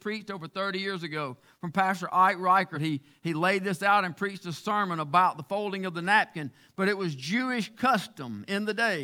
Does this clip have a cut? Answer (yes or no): no